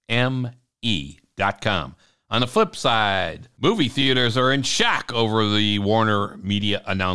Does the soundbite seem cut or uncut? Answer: uncut